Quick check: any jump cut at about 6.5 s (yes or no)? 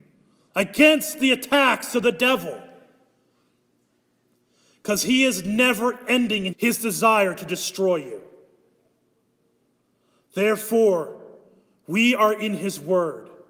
yes